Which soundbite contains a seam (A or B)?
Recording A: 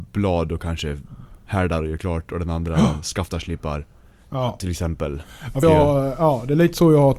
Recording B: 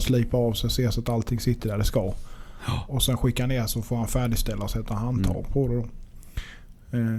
A